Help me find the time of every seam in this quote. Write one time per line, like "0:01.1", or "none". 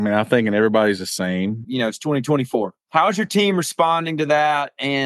0:01.6
0:02.8